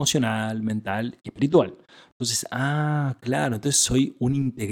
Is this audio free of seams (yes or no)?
yes